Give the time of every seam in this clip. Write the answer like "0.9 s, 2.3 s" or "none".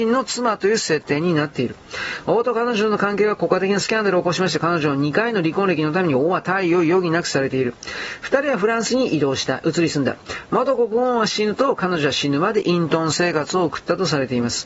none